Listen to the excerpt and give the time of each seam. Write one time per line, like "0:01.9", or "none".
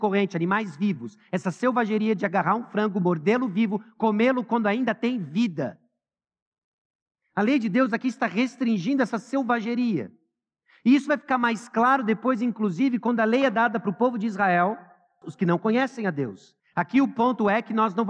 0:15.2
0:16.6